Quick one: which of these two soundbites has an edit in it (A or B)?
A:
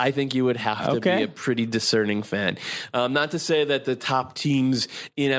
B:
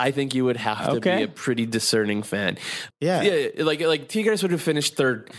B